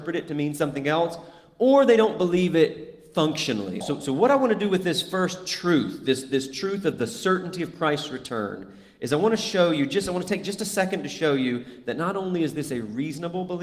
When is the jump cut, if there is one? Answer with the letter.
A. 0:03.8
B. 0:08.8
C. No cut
A